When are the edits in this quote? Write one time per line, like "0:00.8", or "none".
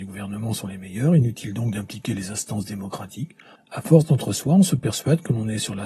0:03.6